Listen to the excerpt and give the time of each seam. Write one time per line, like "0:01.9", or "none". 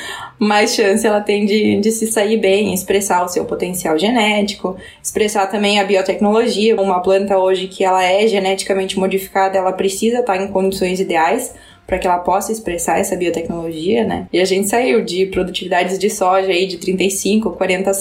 0:06.8
0:14.3